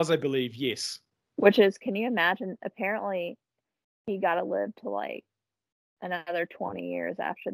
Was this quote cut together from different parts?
no; 0 cuts

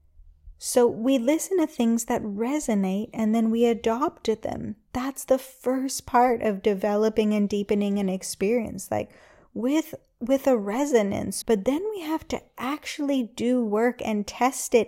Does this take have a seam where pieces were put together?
yes; 1 cut; at 11.4 s

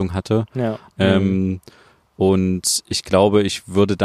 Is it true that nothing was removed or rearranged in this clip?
no; 1 cut; at 0.9 s

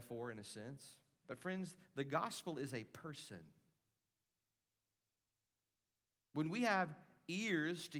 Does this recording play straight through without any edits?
no; 1 cut; at 1.2 s

